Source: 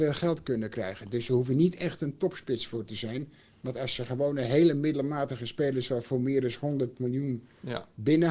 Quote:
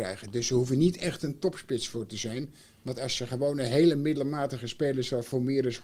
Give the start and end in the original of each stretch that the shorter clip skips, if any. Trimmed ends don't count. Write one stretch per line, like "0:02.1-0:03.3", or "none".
none